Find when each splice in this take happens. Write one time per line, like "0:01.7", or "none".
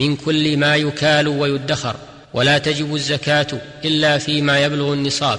0:02.2